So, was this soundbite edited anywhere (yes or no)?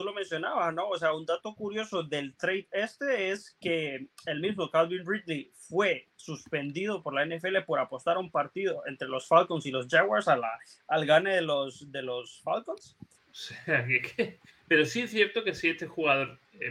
yes